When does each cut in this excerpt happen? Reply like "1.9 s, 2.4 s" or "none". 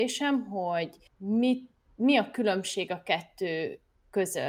none